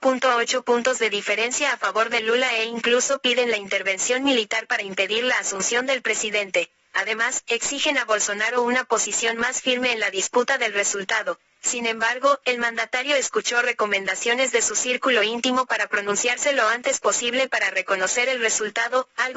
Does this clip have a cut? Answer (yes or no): no